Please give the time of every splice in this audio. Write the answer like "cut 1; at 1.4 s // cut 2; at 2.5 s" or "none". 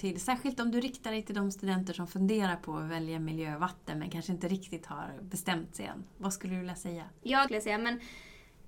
cut 1; at 7.4 s